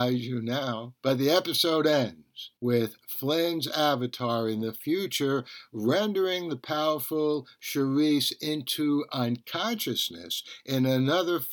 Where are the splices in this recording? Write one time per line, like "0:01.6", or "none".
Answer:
0:01.0
0:02.6